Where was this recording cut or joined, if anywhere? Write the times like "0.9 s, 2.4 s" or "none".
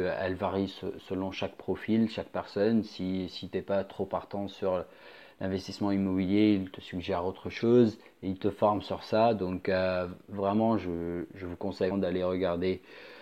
11.9 s